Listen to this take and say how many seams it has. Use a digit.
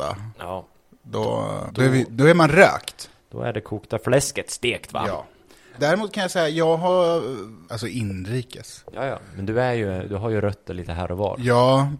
3